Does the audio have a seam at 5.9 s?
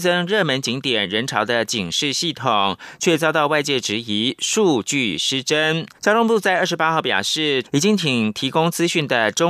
yes; 2 cuts; at 5.9 s, 7.6 s

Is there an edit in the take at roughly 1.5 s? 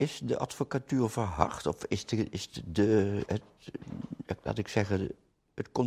no; 1 cut; at 3.3 s

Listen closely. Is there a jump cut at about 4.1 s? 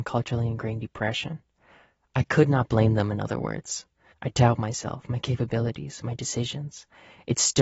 yes; 1 cut; at 4.1 s

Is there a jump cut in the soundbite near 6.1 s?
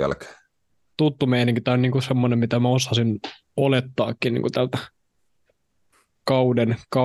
no; 1 cut; at 0.9 s

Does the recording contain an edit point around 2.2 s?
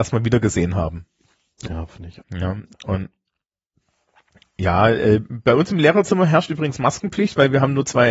yes; 1 cut; at 2.2 s

